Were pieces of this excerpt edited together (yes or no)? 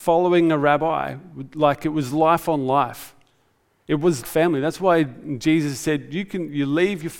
yes